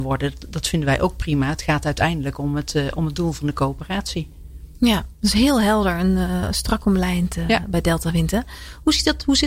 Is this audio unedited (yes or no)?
yes